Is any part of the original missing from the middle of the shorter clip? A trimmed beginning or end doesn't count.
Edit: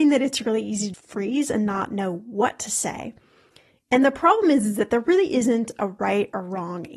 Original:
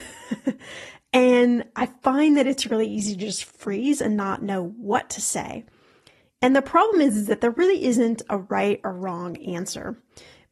yes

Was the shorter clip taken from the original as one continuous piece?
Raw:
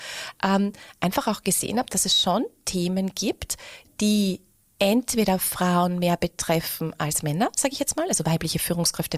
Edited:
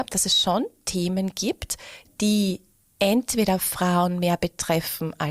yes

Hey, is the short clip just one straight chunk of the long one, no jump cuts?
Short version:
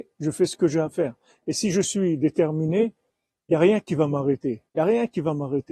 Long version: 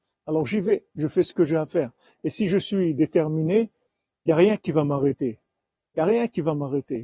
no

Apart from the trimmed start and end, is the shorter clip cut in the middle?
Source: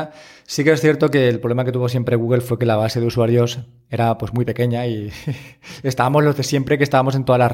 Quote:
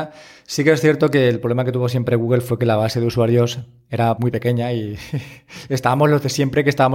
yes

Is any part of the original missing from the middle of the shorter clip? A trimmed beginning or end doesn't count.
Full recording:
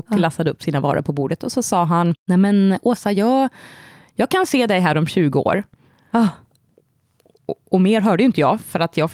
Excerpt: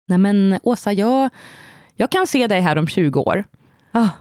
no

